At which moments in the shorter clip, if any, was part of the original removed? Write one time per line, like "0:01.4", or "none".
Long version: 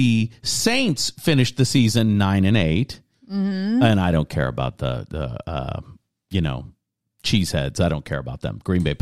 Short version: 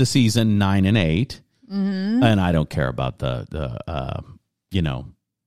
none